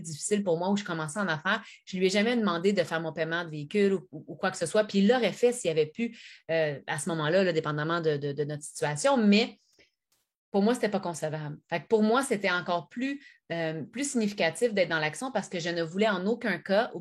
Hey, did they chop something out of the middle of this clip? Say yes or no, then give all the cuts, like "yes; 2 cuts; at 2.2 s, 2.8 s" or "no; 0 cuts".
no; 0 cuts